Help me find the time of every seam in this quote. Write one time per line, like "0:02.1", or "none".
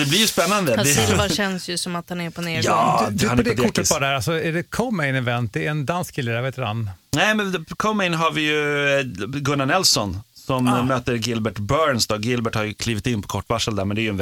none